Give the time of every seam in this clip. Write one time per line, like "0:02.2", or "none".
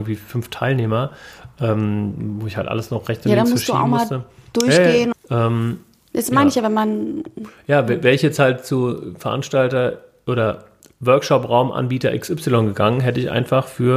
0:05.1